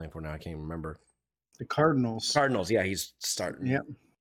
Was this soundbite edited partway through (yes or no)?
no